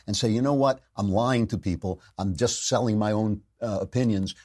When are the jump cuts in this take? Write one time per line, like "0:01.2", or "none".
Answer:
none